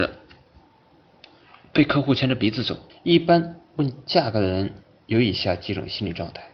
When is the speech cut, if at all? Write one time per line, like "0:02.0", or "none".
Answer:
0:02.9